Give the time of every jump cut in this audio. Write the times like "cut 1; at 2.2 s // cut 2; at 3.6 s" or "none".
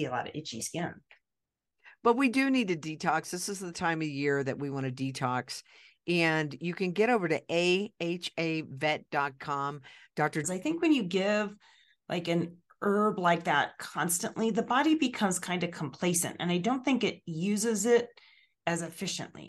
cut 1; at 10.4 s